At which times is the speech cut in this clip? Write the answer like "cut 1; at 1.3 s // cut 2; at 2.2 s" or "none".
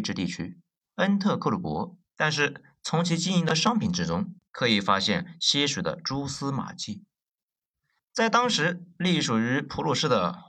cut 1; at 2.0 s // cut 2; at 4.5 s // cut 3; at 8.0 s